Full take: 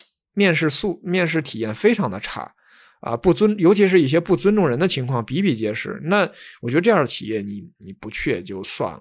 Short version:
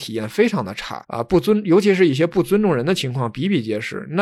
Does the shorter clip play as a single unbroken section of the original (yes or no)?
no